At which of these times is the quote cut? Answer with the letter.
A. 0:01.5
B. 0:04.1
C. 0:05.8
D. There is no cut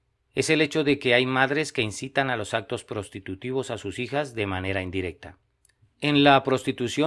C